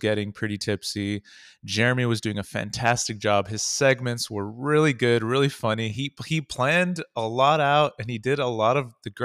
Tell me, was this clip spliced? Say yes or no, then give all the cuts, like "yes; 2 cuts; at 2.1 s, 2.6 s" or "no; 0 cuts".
no; 0 cuts